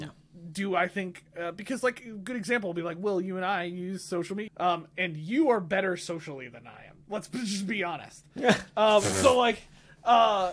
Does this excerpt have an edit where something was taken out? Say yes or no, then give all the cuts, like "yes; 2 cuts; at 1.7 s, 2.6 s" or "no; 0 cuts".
yes; 1 cut; at 4.5 s